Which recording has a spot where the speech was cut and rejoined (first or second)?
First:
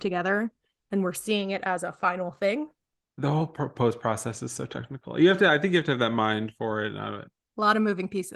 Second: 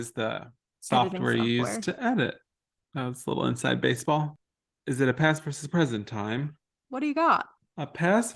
second